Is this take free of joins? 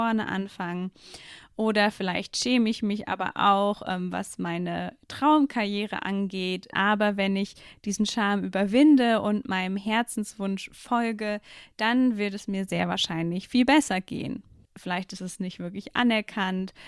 no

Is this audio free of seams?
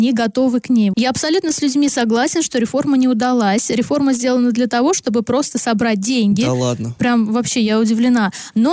no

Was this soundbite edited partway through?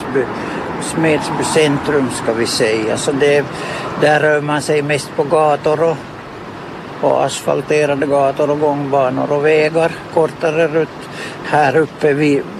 yes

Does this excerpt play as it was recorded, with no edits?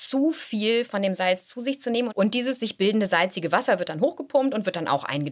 no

